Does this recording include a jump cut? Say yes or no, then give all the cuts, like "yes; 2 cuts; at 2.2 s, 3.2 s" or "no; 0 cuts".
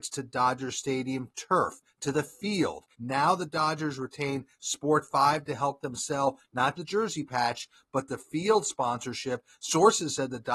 yes; 2 cuts; at 2.9 s, 6.7 s